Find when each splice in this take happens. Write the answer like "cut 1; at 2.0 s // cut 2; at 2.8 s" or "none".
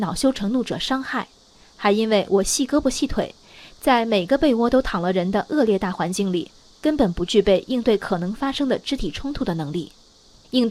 none